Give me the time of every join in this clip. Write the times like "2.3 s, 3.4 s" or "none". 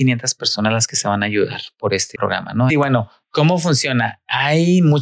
2.7 s